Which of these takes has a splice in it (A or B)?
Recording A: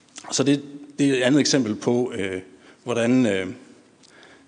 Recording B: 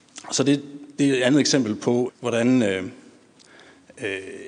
B